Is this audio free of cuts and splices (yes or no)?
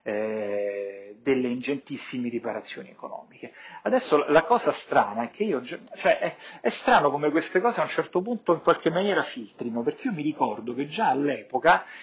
yes